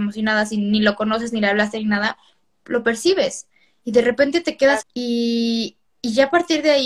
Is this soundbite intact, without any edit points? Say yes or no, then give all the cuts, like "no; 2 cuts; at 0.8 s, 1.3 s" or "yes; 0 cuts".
no; 1 cut; at 4.8 s